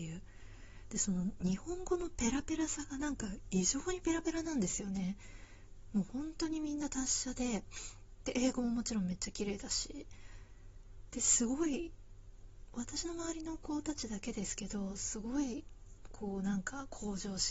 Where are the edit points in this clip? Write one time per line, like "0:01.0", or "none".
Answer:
0:12.7